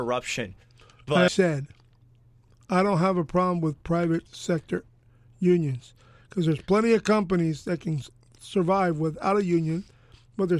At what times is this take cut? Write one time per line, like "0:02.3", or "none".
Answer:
0:01.3